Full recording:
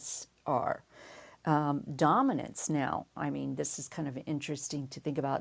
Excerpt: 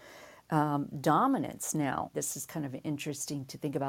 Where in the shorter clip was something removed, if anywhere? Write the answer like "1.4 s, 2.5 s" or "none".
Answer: 2.1 s